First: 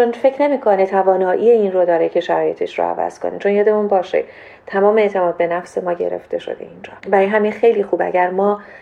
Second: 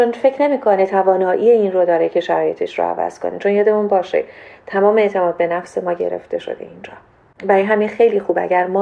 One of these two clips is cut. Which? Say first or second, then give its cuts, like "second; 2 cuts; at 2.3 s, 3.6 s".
first; 1 cut; at 7.0 s